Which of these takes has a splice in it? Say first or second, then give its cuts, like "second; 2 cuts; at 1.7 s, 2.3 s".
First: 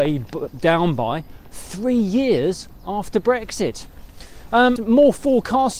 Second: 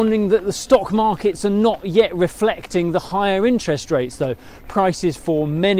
first; 1 cut; at 4.8 s